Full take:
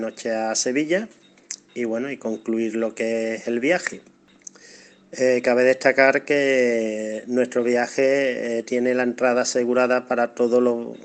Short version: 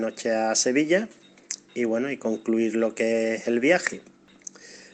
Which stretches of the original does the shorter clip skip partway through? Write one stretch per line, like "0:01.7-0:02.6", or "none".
none